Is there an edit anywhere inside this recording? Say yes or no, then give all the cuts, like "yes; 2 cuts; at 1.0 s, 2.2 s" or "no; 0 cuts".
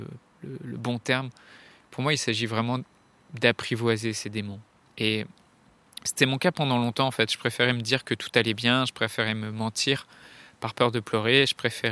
yes; 1 cut; at 4.8 s